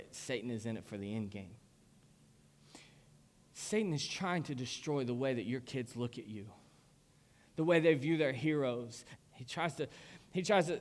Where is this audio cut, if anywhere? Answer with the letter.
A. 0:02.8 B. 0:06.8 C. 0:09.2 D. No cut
C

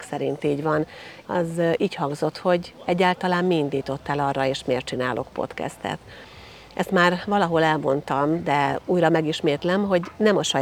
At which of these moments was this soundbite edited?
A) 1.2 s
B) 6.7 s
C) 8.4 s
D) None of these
A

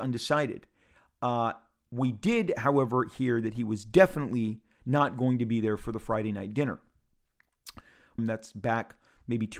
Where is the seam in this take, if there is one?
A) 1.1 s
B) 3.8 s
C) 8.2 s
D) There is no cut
C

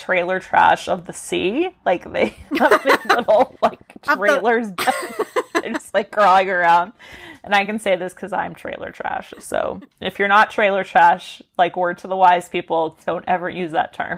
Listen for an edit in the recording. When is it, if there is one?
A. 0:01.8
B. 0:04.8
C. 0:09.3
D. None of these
B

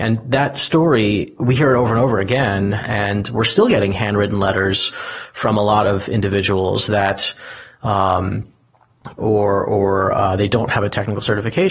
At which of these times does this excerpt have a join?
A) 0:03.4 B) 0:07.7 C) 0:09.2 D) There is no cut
C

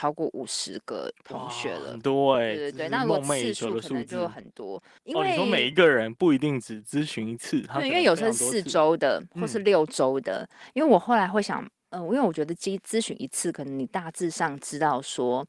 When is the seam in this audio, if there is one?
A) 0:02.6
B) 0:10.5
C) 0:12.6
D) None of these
D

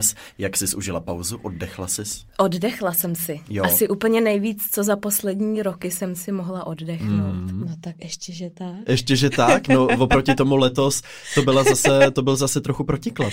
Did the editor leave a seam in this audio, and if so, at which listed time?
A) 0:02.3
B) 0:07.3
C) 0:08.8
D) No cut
A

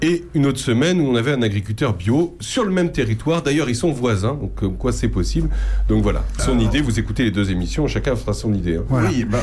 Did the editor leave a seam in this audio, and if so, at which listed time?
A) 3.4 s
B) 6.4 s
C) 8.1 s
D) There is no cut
B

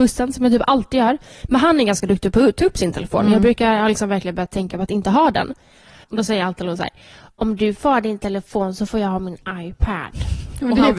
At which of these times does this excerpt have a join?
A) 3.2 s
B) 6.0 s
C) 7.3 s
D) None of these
B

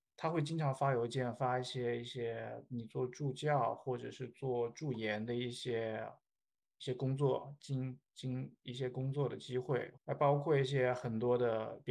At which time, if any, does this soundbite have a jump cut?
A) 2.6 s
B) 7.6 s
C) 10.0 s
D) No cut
C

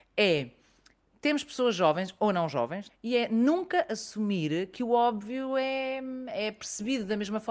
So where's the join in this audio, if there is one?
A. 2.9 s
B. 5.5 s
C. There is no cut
A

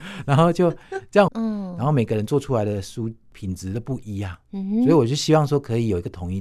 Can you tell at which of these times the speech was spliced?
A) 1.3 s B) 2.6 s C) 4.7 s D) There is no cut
A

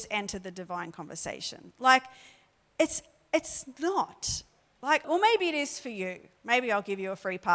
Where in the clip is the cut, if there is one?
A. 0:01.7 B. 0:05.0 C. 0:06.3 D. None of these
B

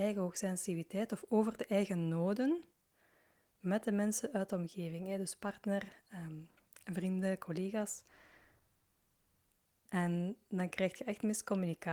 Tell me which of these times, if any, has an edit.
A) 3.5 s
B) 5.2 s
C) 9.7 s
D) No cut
C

